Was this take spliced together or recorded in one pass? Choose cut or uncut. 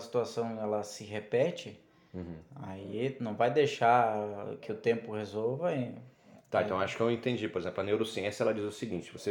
uncut